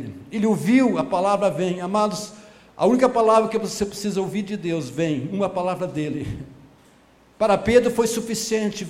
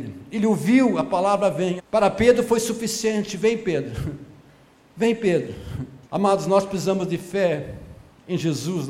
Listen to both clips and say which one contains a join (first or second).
second